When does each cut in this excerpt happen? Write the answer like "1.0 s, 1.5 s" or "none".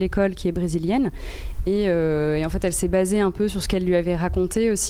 none